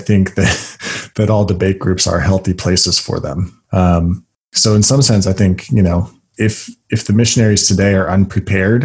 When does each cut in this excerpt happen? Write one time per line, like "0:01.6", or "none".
0:03.7
0:06.3